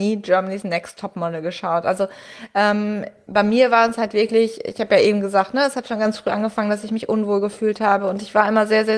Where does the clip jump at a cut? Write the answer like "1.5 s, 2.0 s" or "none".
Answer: none